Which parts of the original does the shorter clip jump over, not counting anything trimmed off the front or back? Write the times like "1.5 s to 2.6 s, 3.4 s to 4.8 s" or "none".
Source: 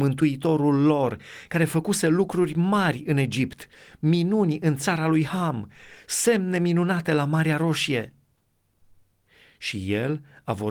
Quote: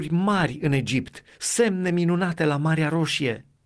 3.8 s to 6.0 s